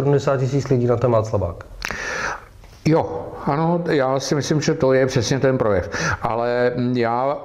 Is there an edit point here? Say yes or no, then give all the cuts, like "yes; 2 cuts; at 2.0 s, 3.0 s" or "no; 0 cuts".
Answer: no; 0 cuts